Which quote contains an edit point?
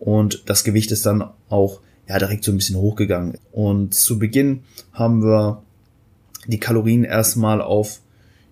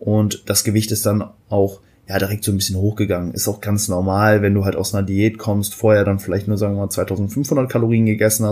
first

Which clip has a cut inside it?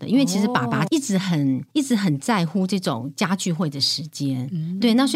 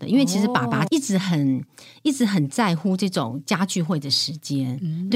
first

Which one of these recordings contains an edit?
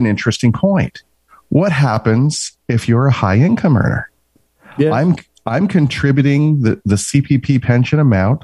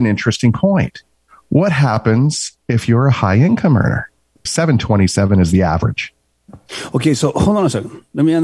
second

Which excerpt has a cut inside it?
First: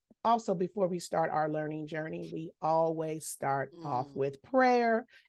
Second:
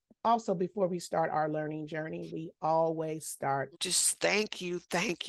second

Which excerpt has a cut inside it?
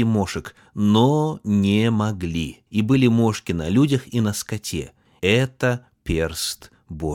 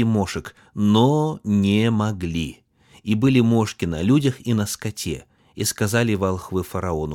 first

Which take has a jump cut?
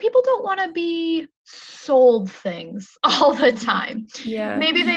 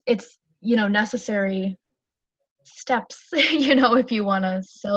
first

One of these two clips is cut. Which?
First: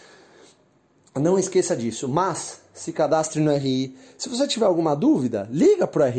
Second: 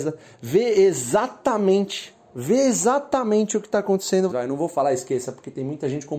second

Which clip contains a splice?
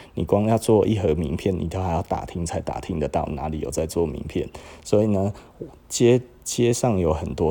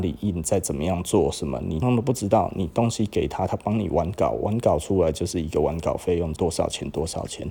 second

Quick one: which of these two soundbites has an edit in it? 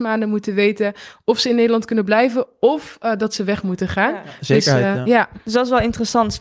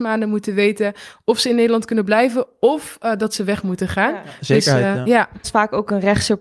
second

